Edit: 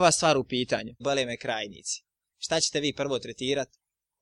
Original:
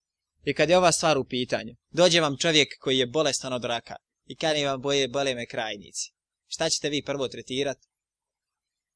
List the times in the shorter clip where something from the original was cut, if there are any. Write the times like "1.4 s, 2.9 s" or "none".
1.0 s